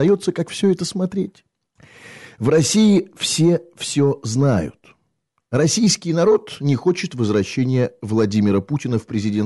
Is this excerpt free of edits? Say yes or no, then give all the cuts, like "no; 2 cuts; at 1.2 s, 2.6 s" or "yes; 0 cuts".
yes; 0 cuts